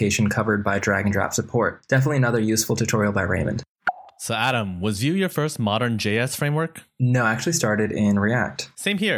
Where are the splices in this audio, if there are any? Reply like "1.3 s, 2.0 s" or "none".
4.1 s